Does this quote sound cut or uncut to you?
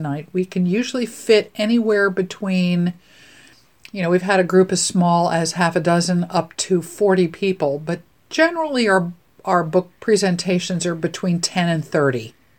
uncut